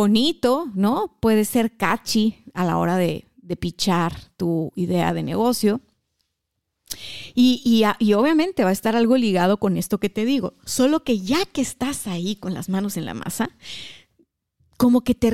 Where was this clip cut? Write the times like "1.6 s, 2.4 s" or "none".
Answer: none